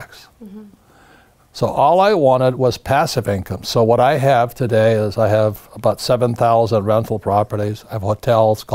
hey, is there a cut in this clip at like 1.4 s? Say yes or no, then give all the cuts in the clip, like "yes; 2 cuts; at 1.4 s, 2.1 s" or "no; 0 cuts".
yes; 1 cut; at 1.4 s